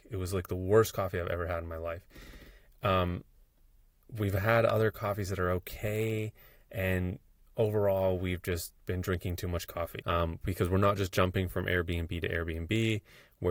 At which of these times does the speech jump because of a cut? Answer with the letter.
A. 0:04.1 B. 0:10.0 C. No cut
B